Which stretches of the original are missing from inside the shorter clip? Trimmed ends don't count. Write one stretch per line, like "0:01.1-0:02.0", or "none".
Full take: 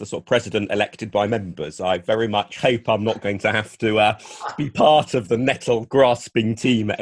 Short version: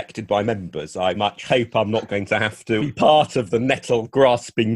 0:02.0-0:02.3
0:03.9-0:04.6